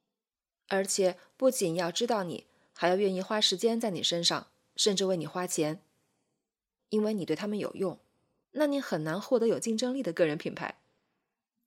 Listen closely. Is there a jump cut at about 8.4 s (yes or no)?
yes